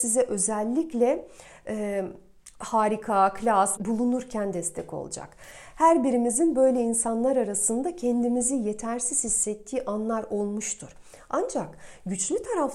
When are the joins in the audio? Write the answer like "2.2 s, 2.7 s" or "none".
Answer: 2.5 s, 3.8 s